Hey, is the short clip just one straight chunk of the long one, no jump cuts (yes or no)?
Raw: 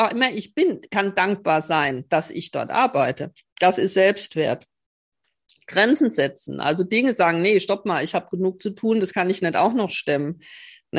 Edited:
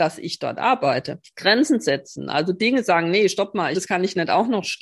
no